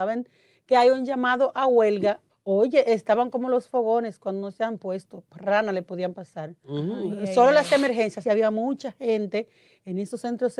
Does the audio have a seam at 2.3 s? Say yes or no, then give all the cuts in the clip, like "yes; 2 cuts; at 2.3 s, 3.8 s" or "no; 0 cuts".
yes; 2 cuts; at 2.3 s, 8.2 s